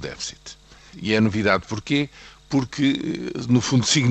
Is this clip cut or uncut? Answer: cut